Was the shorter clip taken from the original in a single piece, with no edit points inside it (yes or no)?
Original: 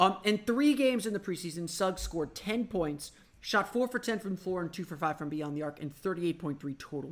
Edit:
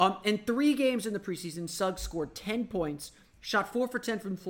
yes